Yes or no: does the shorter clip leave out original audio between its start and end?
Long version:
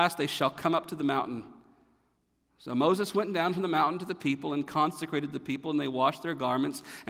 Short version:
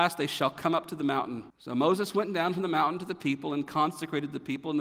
yes